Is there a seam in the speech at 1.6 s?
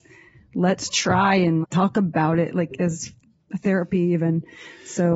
yes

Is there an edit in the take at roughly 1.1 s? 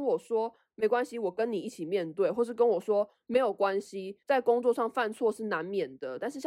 no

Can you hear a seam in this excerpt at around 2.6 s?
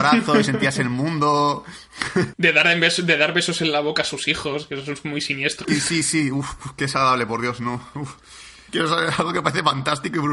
no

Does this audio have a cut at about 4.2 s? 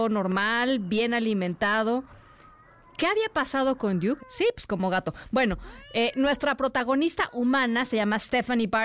yes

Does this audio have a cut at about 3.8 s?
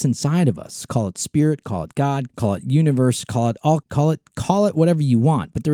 yes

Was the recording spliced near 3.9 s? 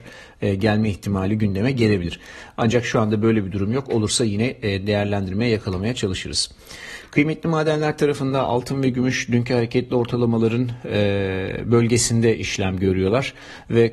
no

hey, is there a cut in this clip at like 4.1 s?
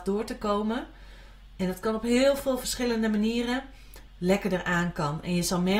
yes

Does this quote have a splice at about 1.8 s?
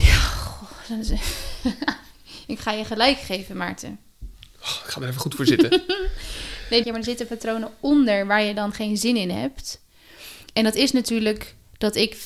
no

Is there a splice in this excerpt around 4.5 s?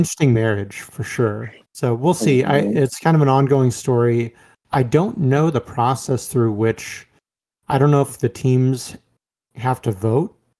no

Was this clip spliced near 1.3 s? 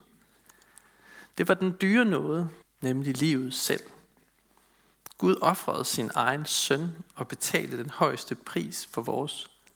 no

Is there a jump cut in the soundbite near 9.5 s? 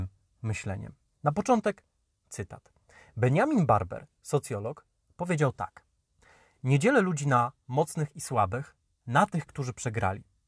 yes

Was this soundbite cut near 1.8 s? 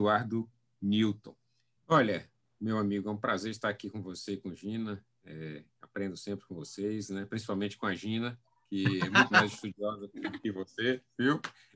yes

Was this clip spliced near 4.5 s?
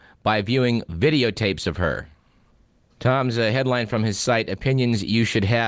no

